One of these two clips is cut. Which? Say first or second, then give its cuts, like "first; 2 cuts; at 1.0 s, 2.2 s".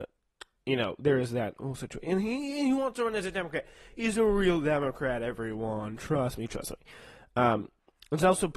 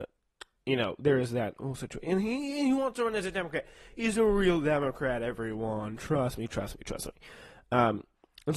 first; 1 cut; at 6.5 s